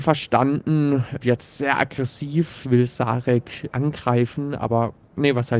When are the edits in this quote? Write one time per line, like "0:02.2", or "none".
0:01.2
0:03.7